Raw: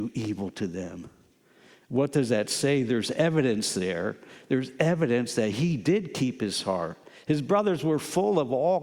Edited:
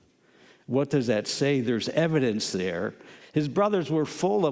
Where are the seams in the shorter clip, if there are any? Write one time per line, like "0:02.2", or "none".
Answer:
0:03.2

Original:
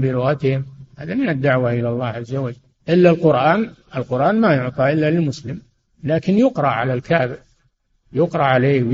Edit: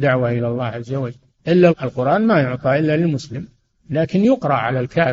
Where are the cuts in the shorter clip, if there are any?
0:01.7

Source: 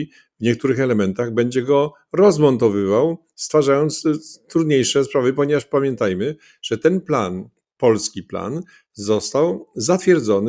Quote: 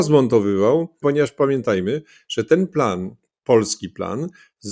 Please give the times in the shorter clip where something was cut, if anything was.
0:01.0

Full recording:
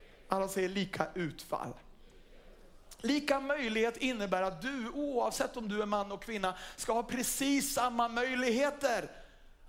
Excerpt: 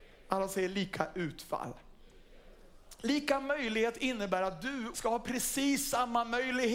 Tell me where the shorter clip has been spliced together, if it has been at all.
0:04.9

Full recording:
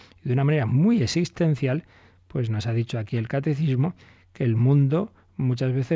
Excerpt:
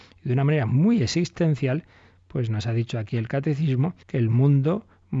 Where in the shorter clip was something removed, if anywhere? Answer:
0:04.0

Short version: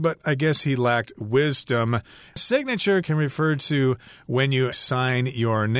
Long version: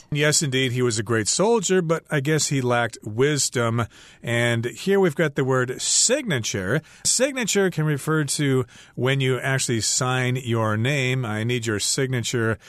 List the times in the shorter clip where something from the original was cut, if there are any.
0:02.3
0:04.7

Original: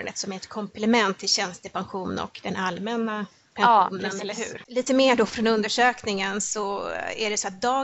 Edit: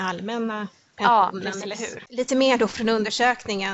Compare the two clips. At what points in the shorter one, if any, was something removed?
none

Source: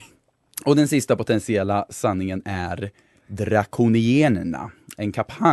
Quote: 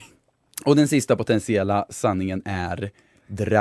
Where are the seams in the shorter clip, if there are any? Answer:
none

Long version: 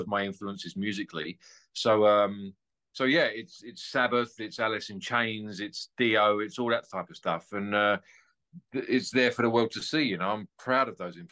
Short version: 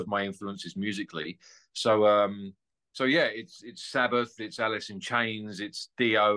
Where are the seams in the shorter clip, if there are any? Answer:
none

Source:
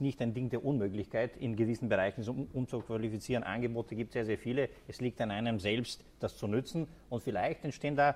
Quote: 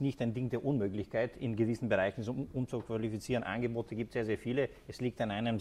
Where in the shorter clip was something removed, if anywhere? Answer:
none

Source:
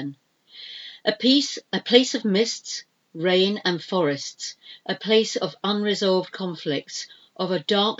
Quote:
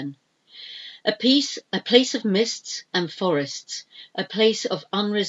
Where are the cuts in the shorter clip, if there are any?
0:02.9

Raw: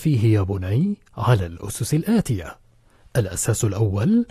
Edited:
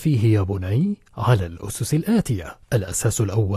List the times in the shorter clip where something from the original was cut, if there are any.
0:02.6

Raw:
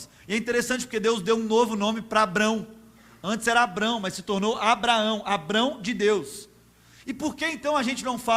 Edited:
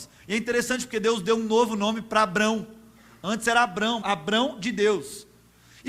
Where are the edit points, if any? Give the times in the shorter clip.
0:04.0

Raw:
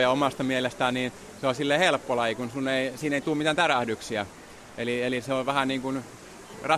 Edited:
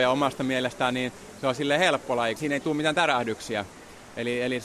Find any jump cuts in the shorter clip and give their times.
0:02.4

